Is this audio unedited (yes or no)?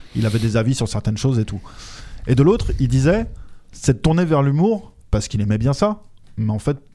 no